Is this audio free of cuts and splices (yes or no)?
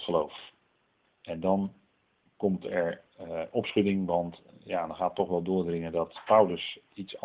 no